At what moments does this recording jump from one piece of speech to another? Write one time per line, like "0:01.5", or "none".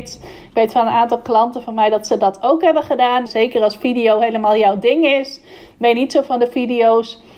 0:03.3

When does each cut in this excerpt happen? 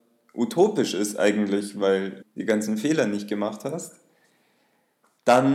0:02.2

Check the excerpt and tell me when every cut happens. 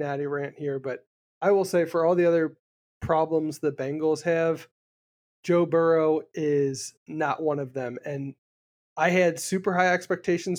none

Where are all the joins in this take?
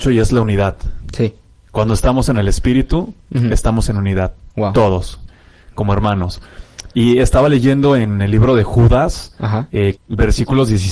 0:05.3
0:10.0

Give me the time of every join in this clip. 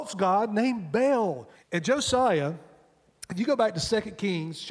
0:01.5

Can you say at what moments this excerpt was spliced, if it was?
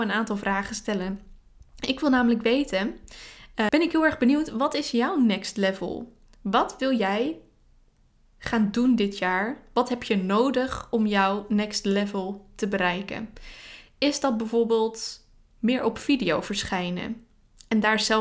0:03.7
0:06.3

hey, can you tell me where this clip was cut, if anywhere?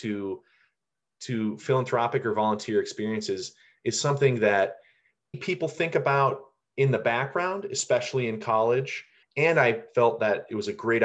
0:05.3
0:09.2

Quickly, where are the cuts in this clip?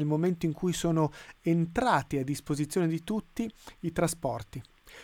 none

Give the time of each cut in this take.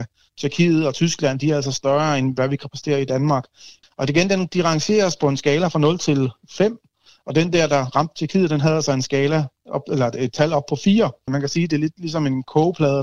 0:03.8
0:11.3

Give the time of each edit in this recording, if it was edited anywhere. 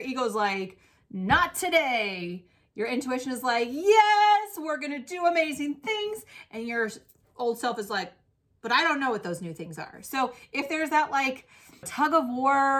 0:11.8

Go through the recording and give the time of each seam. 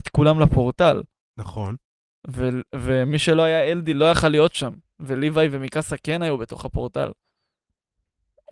none

